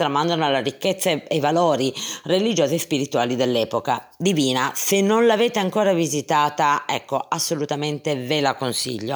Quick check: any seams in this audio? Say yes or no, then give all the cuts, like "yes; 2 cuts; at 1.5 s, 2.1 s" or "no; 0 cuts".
no; 0 cuts